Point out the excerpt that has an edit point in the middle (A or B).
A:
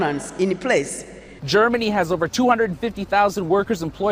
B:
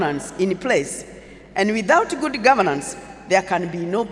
A